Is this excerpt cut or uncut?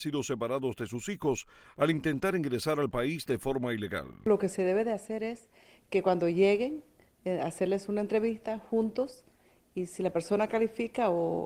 uncut